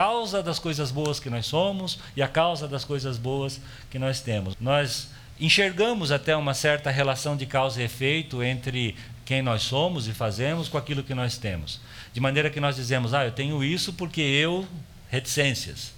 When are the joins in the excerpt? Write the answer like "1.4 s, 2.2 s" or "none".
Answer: 4.5 s

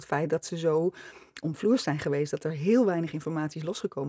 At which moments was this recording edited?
none

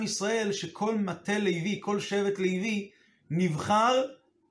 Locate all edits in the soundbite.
none

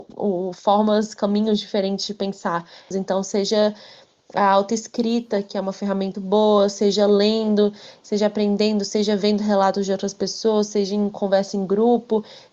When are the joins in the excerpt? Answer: 2.9 s, 6.1 s

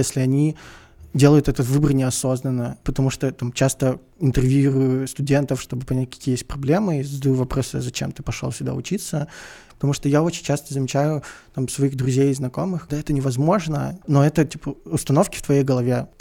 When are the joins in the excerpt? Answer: 9.7 s, 12.9 s, 14.0 s

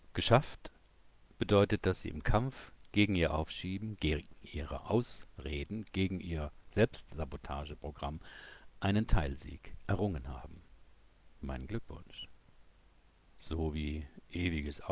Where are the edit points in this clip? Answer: 13.3 s

